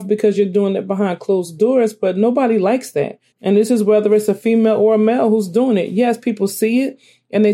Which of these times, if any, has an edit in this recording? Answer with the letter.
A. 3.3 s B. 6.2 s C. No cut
A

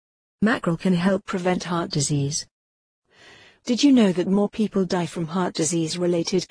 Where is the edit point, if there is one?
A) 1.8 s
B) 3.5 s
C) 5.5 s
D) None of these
D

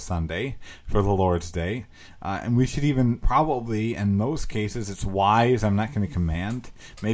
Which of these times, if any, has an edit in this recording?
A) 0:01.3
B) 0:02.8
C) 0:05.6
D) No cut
D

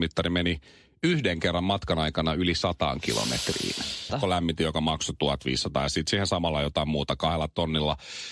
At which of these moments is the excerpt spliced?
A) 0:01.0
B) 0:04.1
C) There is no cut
B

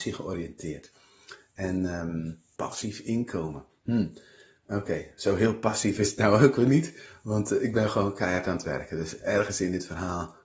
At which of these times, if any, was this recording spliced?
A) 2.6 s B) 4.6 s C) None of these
A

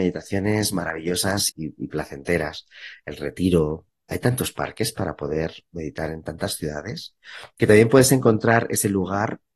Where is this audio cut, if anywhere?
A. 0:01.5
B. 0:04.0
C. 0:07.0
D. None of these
A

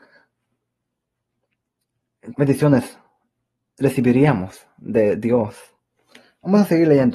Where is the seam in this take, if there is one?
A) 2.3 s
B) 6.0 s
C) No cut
A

